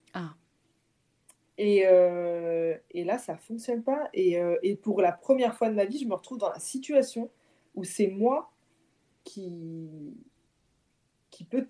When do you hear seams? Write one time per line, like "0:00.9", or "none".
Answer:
none